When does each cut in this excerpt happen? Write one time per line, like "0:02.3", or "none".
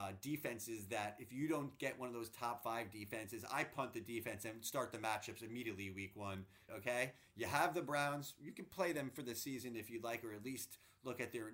0:06.7